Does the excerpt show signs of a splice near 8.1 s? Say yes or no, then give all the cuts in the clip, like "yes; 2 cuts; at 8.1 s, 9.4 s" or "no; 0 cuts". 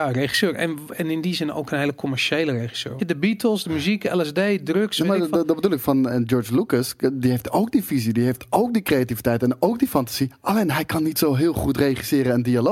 no; 2 cuts; at 3.0 s, 6.1 s